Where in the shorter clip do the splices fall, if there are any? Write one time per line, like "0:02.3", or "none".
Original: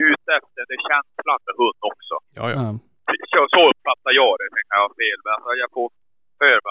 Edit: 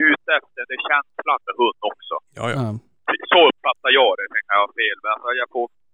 0:03.3